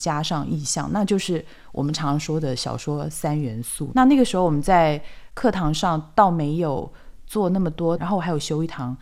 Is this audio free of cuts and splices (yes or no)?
no